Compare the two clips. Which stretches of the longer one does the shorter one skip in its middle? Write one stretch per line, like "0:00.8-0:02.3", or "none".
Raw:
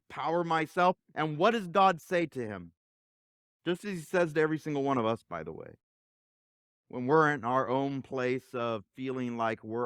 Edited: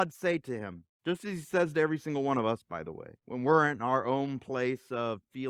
0:02.8-0:03.5
0:05.8-0:06.8